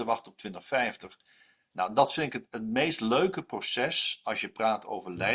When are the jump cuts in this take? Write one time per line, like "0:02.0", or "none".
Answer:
none